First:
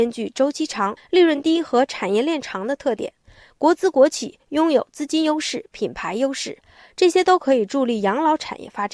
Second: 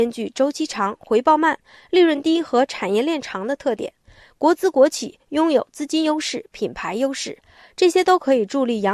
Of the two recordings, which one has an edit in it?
first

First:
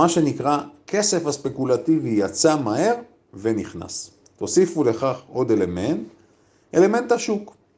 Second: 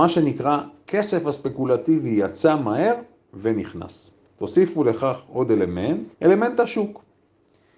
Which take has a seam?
second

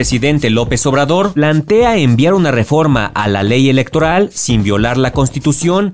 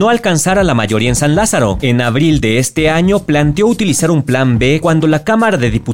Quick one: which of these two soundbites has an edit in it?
second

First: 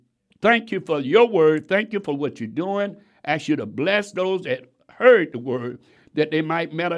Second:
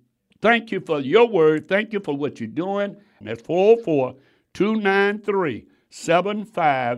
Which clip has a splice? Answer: second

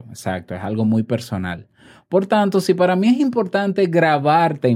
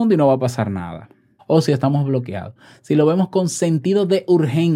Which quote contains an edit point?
second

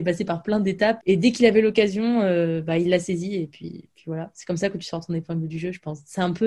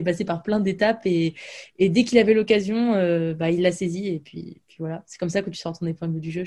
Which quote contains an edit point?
first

